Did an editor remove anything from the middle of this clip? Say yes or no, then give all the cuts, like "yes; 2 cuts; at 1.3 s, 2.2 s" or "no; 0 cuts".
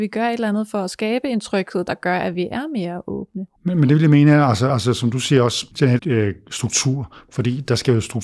yes; 3 cuts; at 3.6 s, 4.7 s, 6.0 s